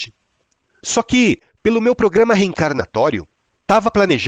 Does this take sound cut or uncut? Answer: uncut